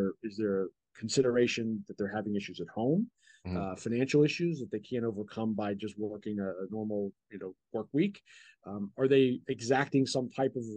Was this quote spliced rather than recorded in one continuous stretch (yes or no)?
no